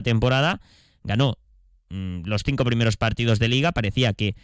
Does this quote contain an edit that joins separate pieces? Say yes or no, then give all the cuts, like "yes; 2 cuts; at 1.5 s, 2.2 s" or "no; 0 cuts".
no; 0 cuts